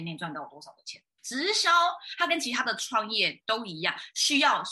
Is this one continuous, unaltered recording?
no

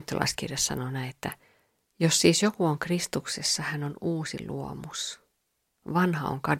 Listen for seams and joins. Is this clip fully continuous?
yes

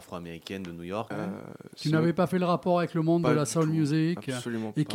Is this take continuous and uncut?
no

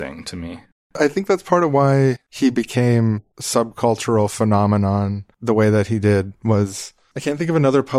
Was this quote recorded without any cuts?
no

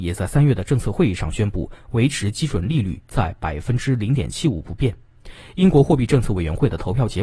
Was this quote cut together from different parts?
no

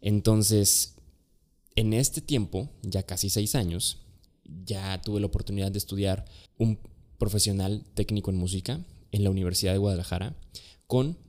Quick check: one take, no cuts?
no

